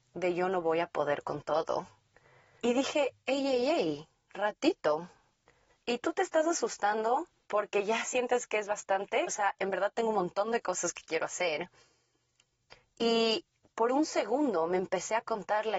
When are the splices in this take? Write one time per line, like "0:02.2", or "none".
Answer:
0:05.7
0:09.3